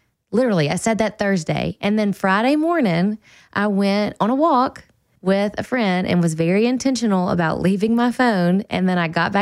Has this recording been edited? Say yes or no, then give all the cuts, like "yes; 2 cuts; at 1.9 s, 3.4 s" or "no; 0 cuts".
no; 0 cuts